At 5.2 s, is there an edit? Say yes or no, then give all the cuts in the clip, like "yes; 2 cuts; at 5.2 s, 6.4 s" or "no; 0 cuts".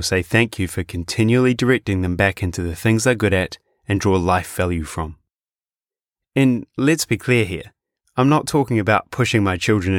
no; 0 cuts